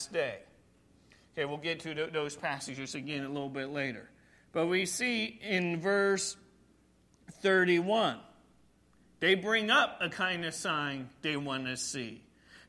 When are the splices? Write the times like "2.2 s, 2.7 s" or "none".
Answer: none